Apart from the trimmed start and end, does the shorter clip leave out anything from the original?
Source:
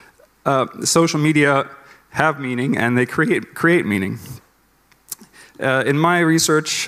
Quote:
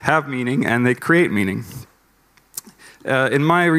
yes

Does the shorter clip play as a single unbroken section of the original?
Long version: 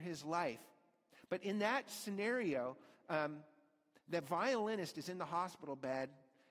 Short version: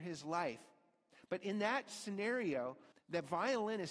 no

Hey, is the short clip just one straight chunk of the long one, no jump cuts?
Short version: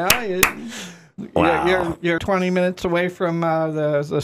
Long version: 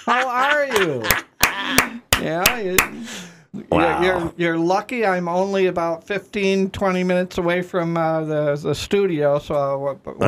no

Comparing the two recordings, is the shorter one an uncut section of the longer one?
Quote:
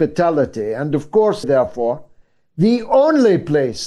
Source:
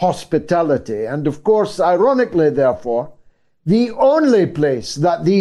no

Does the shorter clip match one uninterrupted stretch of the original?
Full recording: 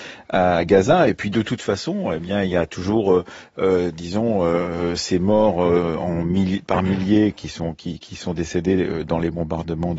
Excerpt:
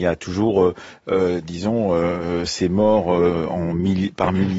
yes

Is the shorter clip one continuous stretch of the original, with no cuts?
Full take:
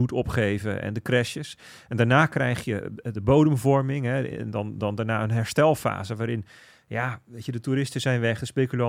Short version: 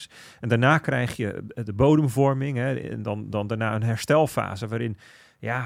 yes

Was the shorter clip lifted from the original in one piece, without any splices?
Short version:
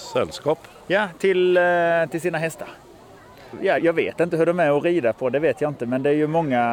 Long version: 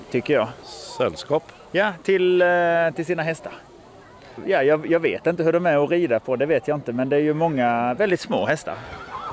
no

